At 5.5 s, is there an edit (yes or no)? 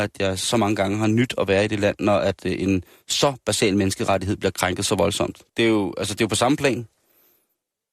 yes